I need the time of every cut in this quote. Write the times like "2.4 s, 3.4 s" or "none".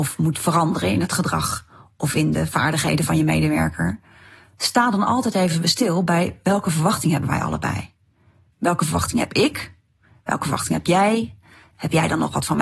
none